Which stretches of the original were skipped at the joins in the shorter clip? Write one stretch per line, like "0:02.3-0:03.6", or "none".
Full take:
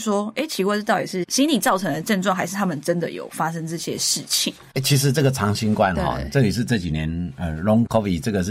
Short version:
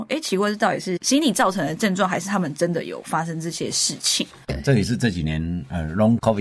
0:04.7-0:06.2